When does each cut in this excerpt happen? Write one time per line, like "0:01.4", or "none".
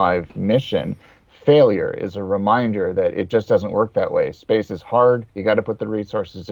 0:05.3